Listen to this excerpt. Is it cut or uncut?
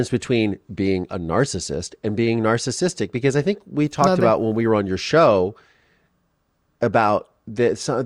uncut